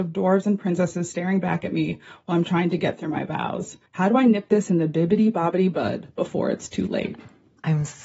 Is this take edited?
yes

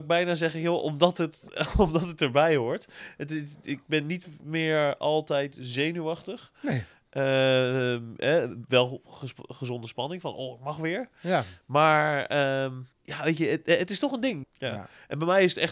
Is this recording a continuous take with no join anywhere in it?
no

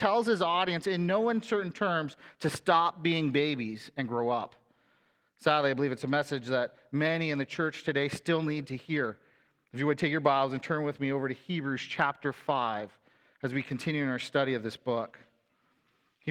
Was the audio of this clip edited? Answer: no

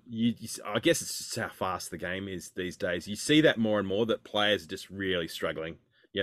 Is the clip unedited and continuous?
yes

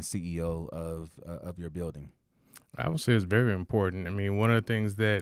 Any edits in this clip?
no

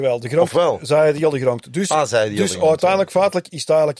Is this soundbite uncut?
yes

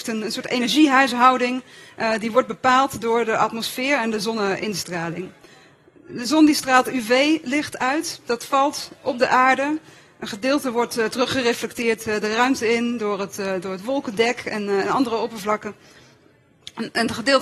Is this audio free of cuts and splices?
yes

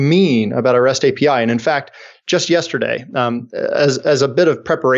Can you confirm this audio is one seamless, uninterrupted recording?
yes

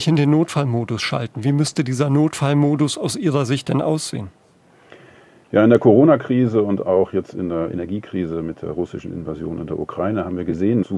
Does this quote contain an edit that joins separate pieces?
no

